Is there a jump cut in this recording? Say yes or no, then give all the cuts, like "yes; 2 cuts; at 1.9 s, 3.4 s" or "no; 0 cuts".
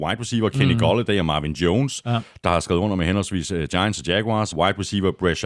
no; 0 cuts